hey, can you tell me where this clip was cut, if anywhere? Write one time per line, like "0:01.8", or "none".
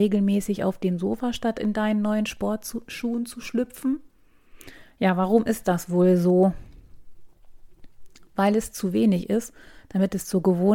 none

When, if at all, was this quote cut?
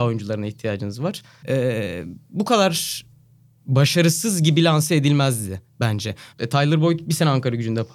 0:01.4
0:06.3

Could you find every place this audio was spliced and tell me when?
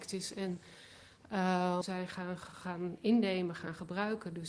0:01.8

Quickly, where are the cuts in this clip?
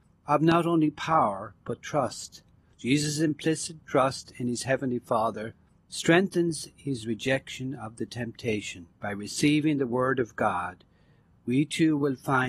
0:02.7
0:08.9

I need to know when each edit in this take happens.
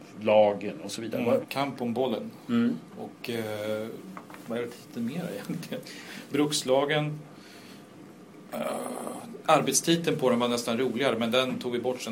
0:01.4
0:09.4

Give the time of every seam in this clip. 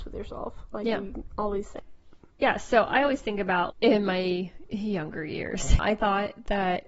0:03.7
0:05.8

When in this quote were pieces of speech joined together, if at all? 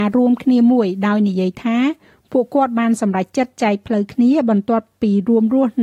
none

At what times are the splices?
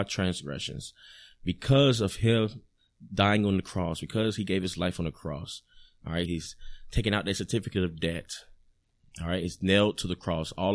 0:06.3

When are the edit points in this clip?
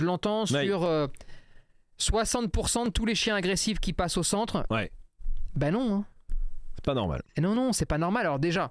0:04.7

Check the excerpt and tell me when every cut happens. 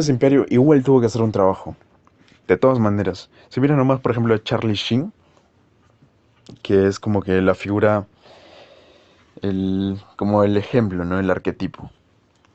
none

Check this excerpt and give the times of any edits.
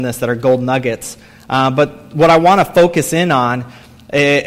none

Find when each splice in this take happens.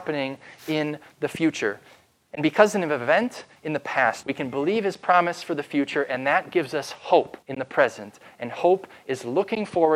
0:04.2
0:07.4

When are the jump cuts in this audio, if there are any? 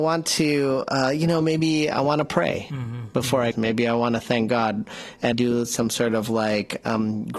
0:03.5
0:05.3

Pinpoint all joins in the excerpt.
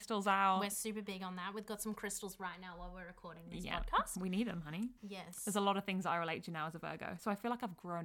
0:05.0

